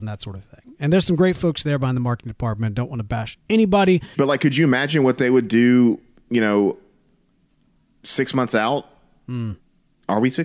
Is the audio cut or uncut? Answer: cut